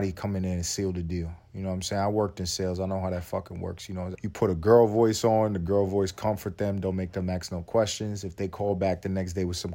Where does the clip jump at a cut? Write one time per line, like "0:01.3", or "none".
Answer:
0:04.1